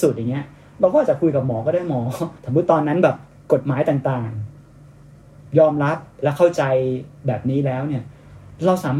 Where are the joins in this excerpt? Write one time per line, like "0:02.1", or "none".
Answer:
0:02.4